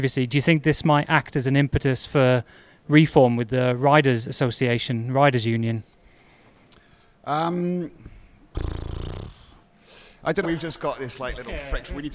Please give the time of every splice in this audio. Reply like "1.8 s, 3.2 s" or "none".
10.4 s